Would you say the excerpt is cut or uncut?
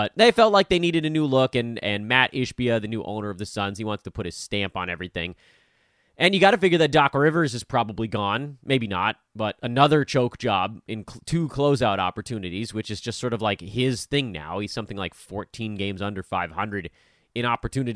uncut